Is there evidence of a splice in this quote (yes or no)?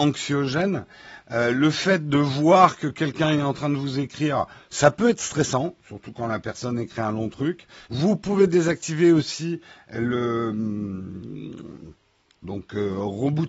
yes